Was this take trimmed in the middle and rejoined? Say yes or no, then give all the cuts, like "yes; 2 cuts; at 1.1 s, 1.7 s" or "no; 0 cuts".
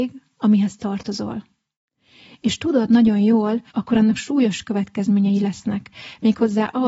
yes; 1 cut; at 3.7 s